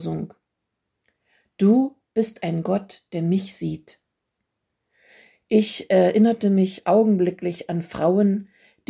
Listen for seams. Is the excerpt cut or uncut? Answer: uncut